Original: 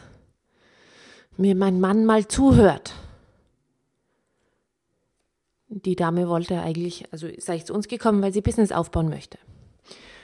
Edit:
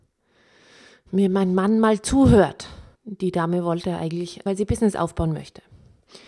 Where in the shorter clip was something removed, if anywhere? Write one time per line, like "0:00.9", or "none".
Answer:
0:02.9
0:04.5